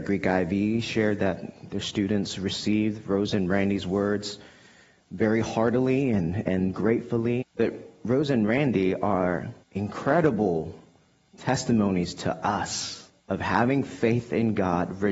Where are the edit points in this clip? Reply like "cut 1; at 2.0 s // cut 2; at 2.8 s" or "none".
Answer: cut 1; at 7.4 s // cut 2; at 9.6 s // cut 3; at 13.2 s